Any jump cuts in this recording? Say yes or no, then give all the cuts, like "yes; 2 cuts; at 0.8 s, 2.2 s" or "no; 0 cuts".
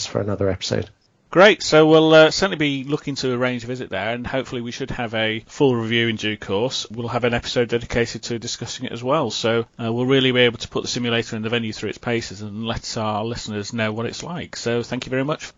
yes; 1 cut; at 6.9 s